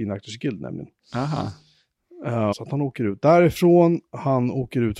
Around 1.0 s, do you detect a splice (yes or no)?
no